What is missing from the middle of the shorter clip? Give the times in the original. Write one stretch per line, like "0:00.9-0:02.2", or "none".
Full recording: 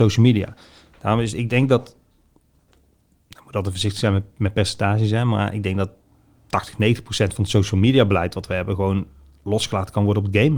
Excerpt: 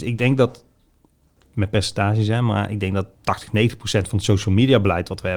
0:02.8-0:04.3
0:06.0-0:06.4